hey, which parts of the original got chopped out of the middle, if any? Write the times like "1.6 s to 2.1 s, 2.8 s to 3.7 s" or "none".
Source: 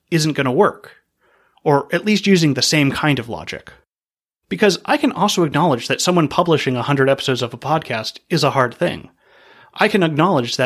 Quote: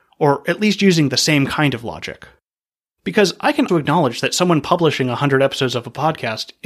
5.1 s to 5.4 s